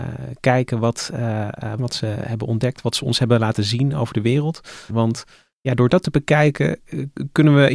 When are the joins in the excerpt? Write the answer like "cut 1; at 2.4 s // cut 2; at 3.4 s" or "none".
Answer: cut 1; at 1.8 s // cut 2; at 4.9 s